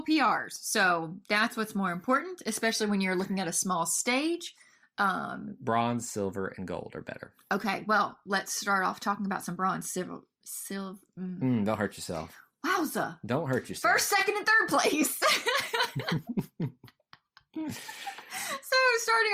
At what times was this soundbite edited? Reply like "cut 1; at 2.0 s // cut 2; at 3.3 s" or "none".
cut 1; at 10.4 s

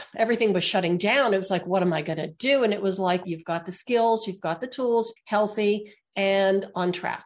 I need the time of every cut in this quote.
cut 1; at 3.2 s // cut 2; at 5.2 s

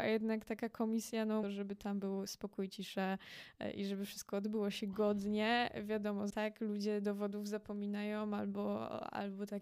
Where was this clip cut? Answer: cut 1; at 1.4 s // cut 2; at 6.3 s

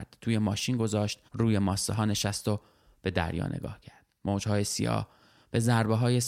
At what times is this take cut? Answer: cut 1; at 1.3 s

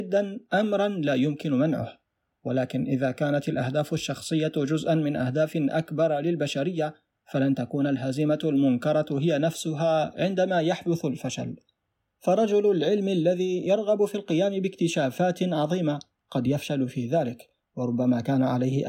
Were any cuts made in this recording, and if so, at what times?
none

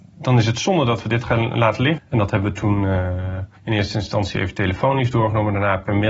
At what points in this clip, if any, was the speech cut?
cut 1; at 2.0 s // cut 2; at 3.6 s

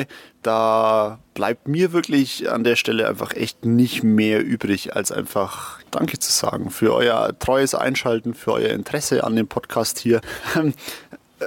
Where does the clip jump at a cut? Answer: cut 1; at 5.8 s // cut 2; at 10.2 s

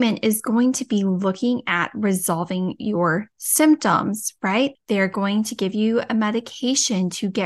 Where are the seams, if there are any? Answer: cut 1; at 4.8 s

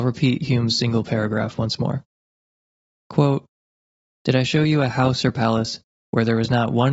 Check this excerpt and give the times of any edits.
none

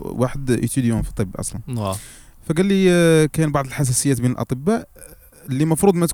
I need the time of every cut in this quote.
none

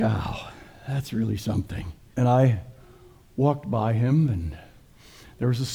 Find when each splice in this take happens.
cut 1; at 2.1 s

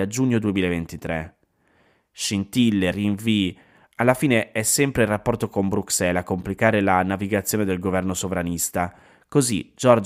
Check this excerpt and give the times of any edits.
cut 1; at 2.9 s

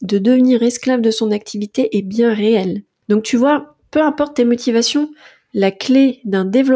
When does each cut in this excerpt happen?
cut 1; at 3.0 s

